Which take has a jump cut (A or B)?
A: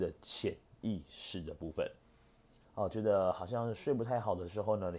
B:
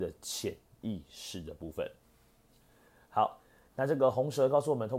A